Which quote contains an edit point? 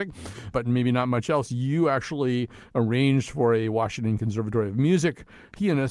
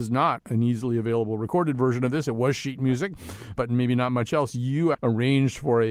second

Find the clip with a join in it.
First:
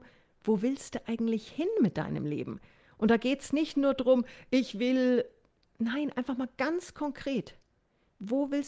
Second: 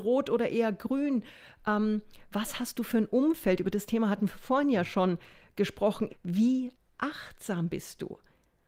second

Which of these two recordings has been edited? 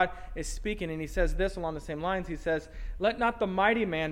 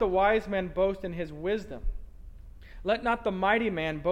first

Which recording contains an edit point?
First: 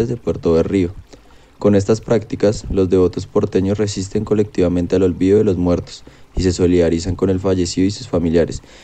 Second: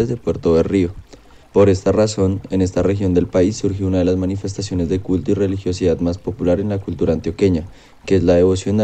second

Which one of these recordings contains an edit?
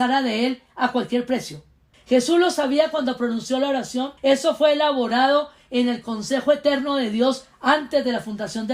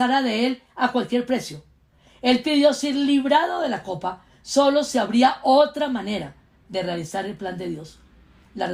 first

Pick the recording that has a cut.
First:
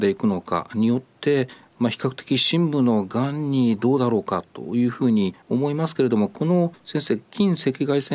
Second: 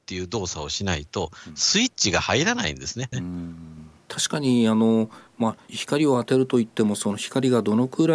second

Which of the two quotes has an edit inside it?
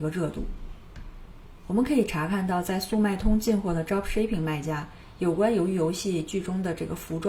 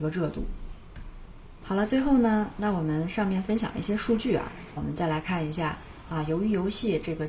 second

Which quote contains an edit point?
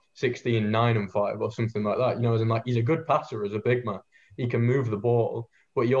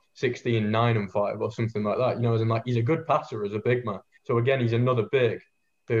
second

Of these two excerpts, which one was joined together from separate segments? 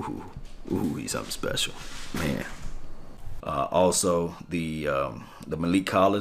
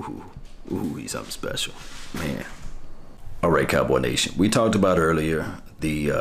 first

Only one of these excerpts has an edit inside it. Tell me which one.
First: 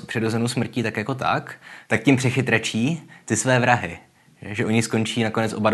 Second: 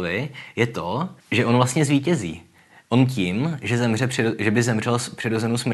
second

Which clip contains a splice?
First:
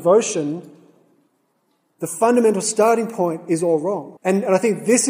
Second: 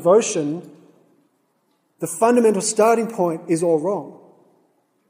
first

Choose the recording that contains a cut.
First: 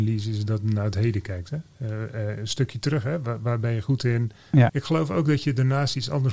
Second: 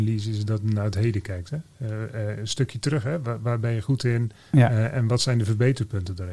first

